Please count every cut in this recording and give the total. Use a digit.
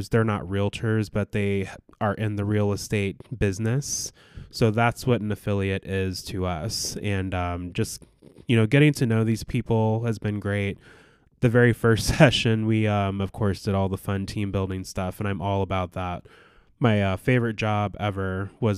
0